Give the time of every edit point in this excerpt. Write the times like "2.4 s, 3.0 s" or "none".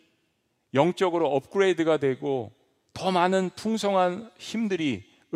none